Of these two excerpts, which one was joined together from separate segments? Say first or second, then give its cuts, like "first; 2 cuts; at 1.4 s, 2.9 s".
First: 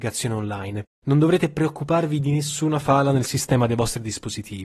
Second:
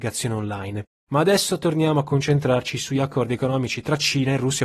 second; 1 cut; at 0.9 s